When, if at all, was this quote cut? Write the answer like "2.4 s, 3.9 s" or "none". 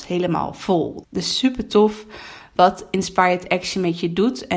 1.0 s